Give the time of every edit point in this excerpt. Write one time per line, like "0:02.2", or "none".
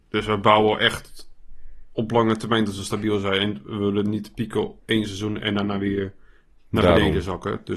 0:04.8